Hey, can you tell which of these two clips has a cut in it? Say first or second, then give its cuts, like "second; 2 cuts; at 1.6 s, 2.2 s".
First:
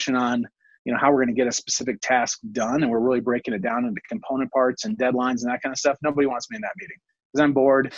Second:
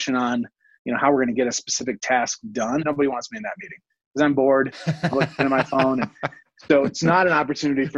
second; 1 cut; at 2.8 s